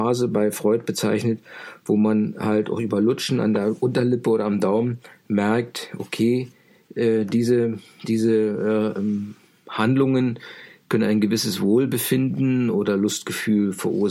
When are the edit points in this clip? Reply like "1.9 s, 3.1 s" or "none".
none